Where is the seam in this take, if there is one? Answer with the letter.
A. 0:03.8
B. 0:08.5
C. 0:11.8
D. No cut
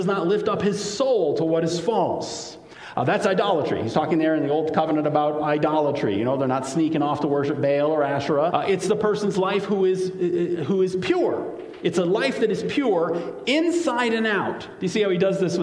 B